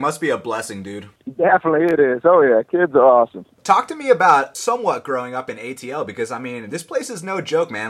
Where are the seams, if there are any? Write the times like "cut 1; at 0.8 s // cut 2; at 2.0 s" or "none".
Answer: none